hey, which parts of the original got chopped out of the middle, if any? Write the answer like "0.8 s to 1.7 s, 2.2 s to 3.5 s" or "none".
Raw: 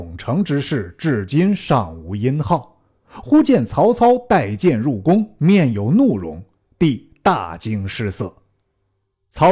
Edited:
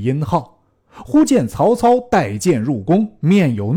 none